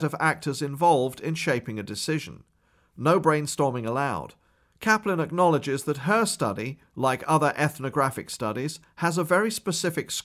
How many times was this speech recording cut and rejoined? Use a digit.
0